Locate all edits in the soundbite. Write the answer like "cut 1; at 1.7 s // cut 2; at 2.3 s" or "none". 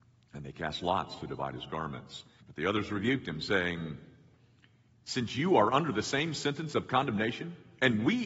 cut 1; at 2.4 s // cut 2; at 4.9 s